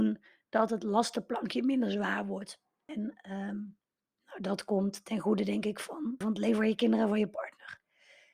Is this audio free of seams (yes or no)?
no